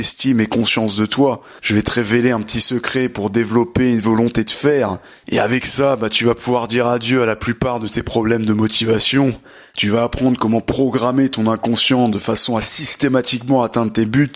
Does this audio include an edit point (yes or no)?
yes